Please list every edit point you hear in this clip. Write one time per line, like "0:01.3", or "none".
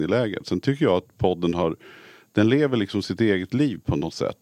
none

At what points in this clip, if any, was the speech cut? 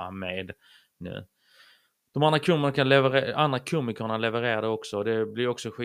none

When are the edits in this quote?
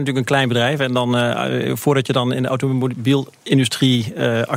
none

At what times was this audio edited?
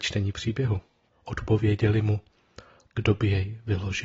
0:01.1
0:02.9

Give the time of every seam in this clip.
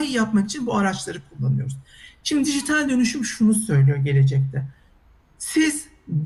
none

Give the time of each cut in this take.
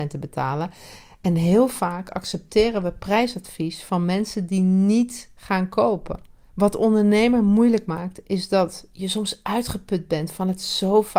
0:01.0
0:06.5

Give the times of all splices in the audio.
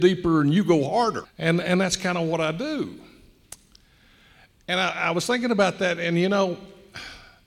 0:01.2

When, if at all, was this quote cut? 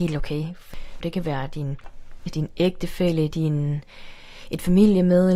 0:01.0
0:02.3
0:03.3

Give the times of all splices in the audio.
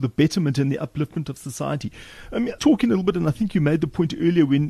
0:02.6

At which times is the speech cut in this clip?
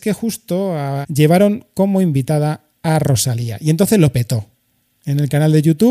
0:01.0

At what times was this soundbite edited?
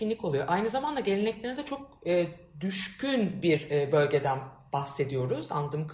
none

